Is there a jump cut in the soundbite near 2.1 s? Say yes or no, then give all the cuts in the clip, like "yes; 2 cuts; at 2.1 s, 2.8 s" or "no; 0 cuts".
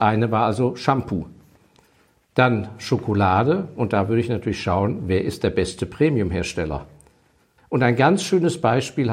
no; 1 cut; at 7.6 s